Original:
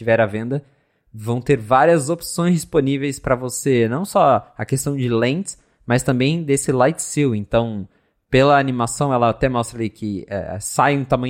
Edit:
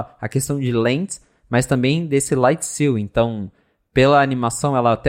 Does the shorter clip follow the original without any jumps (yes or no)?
yes